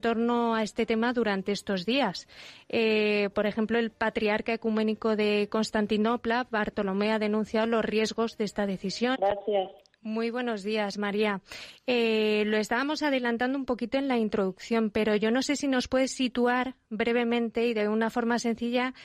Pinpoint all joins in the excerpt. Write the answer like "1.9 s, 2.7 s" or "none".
9.1 s